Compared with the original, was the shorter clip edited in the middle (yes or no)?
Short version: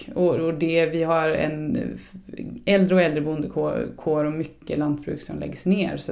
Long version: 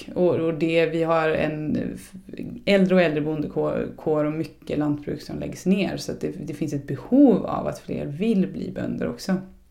no